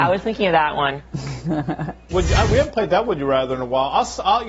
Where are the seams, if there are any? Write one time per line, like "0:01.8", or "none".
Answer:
0:02.1